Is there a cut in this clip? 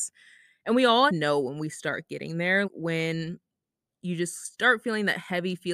yes; 2 cuts; at 1.1 s, 2.6 s

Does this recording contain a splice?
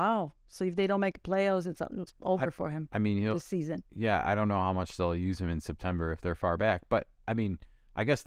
no; 0 cuts

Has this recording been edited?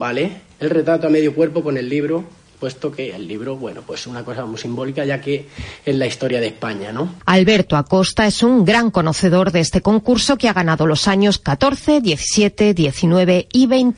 no; 0 cuts

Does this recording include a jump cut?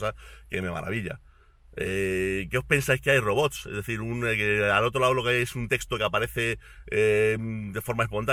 no; 0 cuts

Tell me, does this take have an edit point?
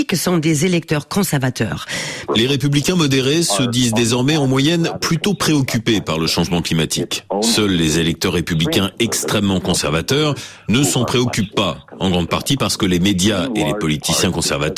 yes; 1 cut; at 2.3 s

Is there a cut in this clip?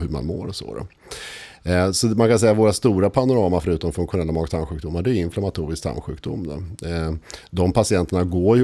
no; 0 cuts

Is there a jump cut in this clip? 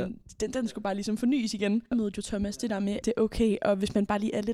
yes; 2 cuts; at 1.9 s, 3.0 s

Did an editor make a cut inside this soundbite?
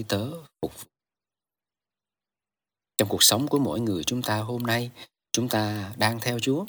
no; 0 cuts

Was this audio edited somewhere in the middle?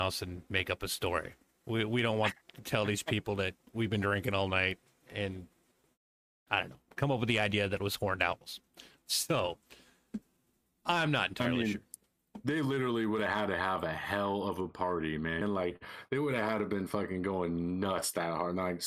yes; 1 cut; at 15.4 s

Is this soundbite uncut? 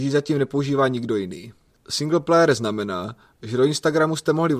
no; 1 cut; at 1.7 s

